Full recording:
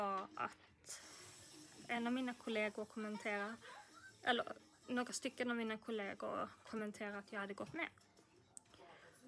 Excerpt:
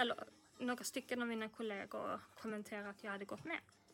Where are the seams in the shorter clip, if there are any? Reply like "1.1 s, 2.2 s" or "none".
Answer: none